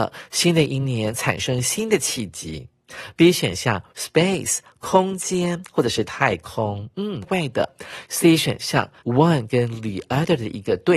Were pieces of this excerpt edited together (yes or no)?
yes